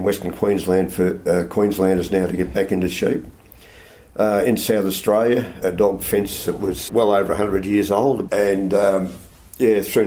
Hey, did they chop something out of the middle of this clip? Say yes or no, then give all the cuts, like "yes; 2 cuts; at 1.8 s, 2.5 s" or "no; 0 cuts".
yes; 3 cuts; at 5.6 s, 6.9 s, 8.3 s